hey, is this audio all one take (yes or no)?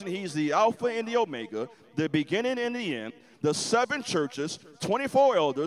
no